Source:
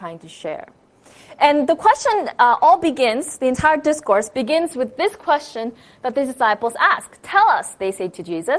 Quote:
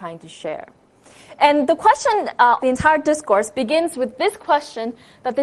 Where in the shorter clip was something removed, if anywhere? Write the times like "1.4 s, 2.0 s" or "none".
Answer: 2.6 s